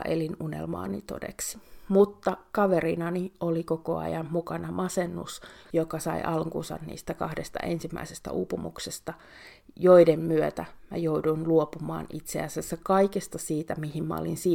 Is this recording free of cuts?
no; 1 cut; at 5.6 s

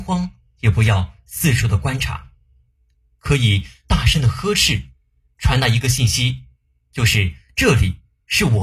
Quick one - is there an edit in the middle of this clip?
no; 0 cuts

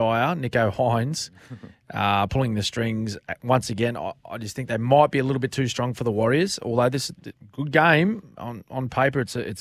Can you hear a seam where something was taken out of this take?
no; 0 cuts

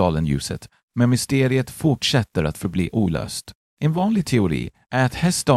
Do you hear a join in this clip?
no; 0 cuts

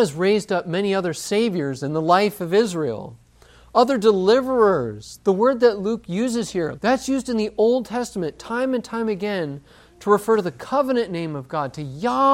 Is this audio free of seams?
no; 2 cuts; at 5.2 s, 6.8 s

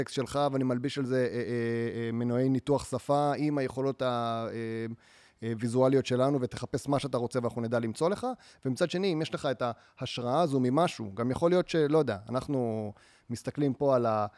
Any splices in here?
no; 0 cuts

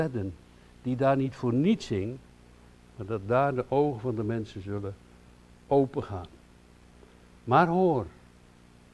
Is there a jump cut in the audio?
no; 0 cuts

